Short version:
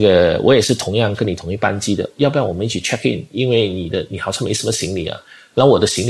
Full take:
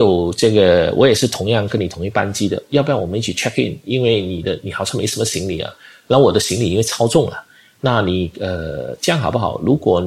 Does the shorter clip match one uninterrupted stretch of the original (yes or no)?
yes